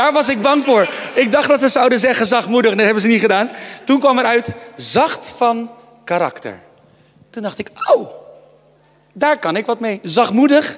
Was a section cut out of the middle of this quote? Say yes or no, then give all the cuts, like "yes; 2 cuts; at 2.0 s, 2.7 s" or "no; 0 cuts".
no; 0 cuts